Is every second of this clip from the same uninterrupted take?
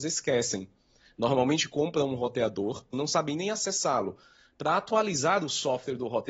no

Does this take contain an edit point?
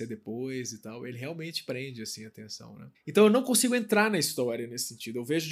yes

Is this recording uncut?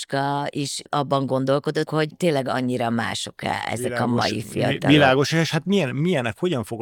no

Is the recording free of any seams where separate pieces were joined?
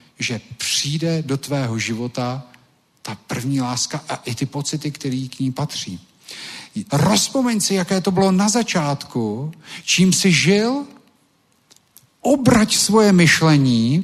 no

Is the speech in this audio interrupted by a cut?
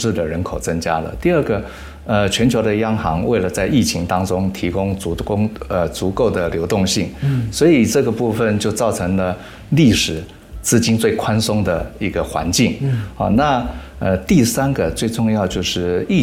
no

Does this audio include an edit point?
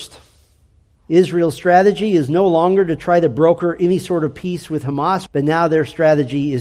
yes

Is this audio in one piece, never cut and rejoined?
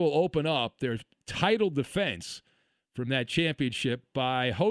yes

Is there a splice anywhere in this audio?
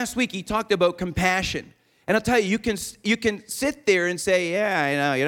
no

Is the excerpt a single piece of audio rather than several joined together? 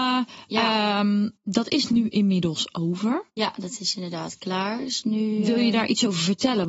yes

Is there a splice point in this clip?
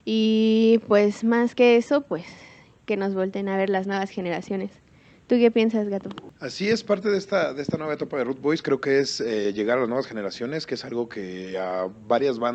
no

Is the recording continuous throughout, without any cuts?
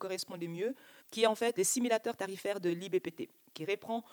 no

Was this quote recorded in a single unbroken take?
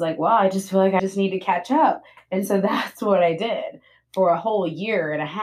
no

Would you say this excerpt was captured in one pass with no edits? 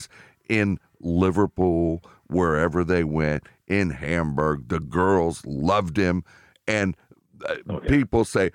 yes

